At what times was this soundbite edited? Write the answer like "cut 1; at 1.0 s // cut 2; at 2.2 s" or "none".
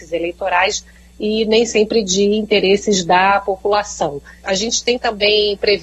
cut 1; at 4.4 s